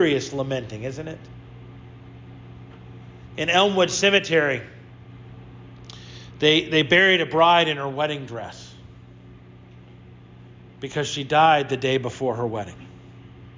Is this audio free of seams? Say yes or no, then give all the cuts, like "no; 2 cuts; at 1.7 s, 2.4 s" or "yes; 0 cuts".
yes; 0 cuts